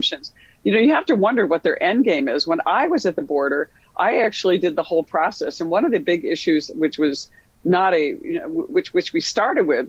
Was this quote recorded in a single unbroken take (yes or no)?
yes